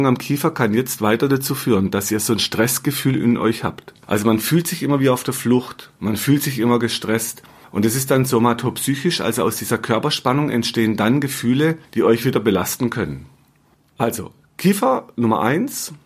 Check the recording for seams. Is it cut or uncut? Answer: uncut